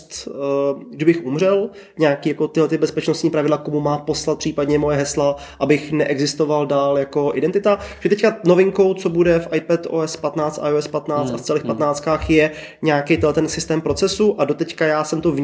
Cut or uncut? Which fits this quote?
uncut